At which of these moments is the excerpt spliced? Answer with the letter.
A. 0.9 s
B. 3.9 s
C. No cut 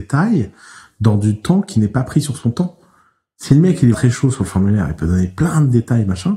B